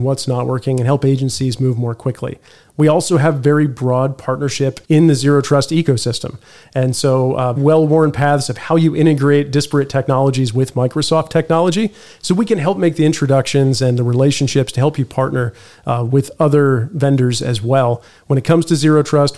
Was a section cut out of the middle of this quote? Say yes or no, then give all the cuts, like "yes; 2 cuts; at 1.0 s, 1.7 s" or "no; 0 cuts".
yes; 2 cuts; at 4.8 s, 7.6 s